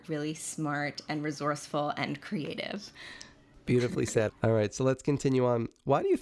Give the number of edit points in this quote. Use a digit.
1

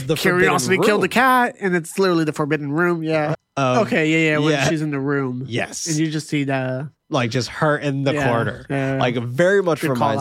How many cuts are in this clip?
1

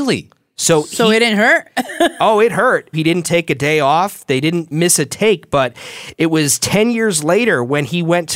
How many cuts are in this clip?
2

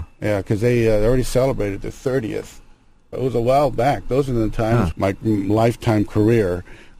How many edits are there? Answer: 2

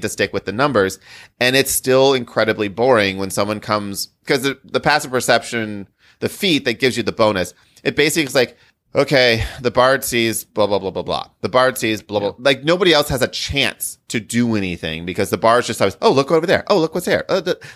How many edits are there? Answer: 0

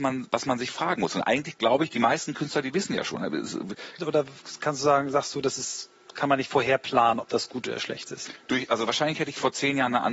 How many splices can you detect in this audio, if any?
1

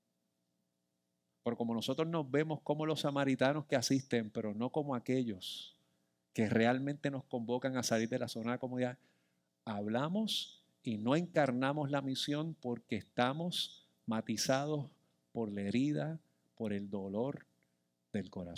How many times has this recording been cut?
0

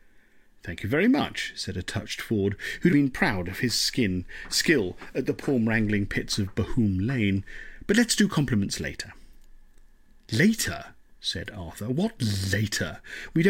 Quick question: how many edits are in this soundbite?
1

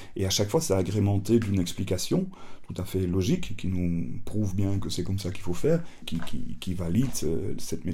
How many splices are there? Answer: 1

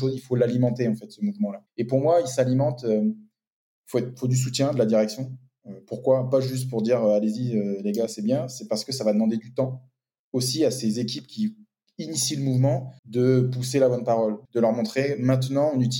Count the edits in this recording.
2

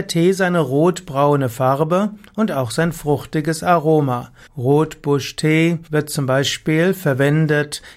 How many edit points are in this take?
2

